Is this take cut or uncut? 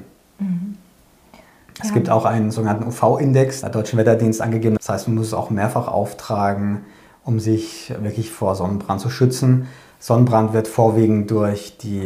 cut